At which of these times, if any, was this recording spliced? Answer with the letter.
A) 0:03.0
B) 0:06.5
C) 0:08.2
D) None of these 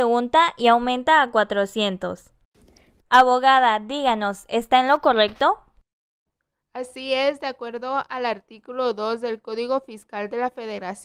A